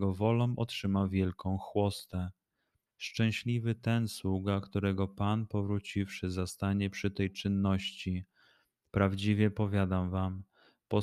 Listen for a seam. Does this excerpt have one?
yes; 1 cut; at 2.9 s

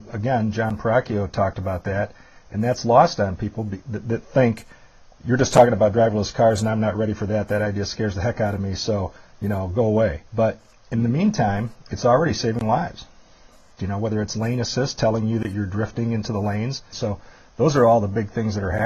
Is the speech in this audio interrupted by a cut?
yes; 3 cuts; at 10.3 s, 13.8 s, 16.9 s

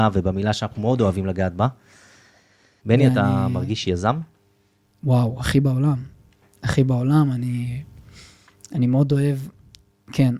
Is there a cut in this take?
yes; 1 cut; at 2.8 s

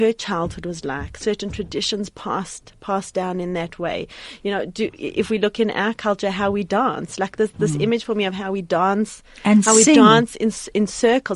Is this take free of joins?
yes; 0 cuts

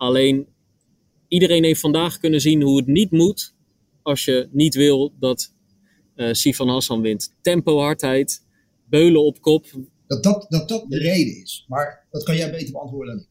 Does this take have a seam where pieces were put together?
yes; 2 cuts; at 7.3 s, 10.0 s

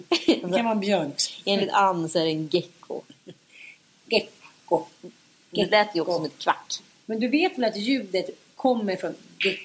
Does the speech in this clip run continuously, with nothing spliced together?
yes; 0 cuts

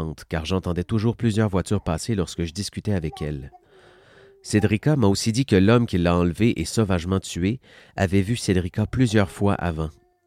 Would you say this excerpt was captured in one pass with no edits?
yes; 0 cuts

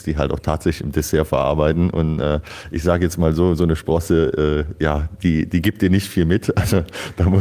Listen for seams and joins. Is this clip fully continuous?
yes; 0 cuts

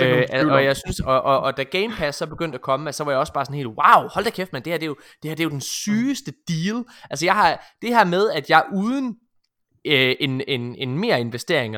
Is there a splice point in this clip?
no; 0 cuts

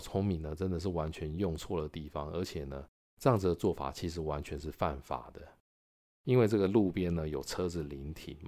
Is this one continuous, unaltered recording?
no; 1 cut; at 6.1 s

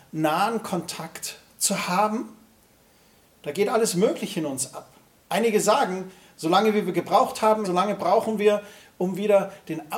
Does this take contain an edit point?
yes; 1 cut; at 7.6 s

